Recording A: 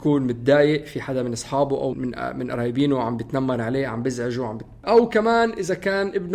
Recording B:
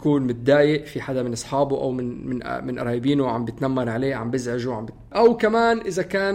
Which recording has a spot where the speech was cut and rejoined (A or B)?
A